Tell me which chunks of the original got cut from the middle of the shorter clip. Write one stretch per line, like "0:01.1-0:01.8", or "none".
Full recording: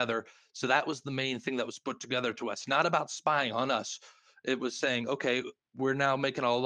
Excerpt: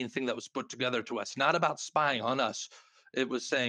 none

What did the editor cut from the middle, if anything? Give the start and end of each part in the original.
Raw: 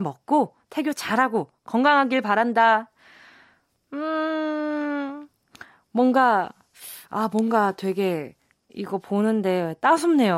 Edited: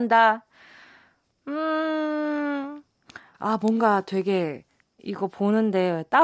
0:05.8-0:07.1

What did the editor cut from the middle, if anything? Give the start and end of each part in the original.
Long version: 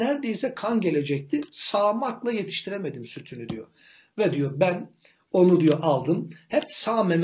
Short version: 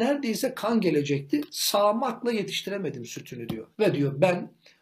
0:03.7-0:04.1

